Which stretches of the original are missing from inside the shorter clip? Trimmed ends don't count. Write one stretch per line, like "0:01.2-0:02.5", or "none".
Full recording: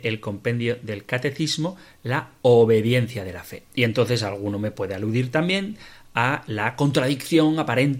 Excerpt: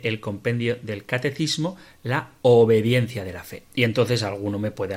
none